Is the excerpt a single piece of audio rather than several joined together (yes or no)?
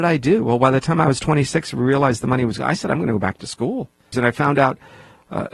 no